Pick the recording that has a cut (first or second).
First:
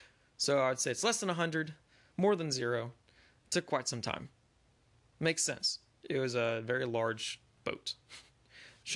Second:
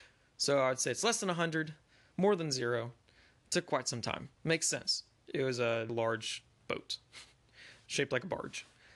second